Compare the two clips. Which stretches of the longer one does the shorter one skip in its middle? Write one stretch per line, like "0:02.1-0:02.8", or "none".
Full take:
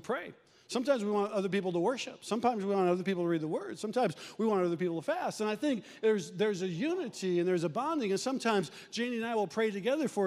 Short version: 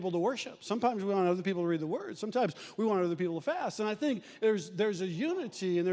none